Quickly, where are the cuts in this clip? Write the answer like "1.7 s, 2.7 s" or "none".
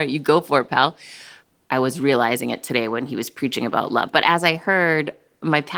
1.7 s, 4.1 s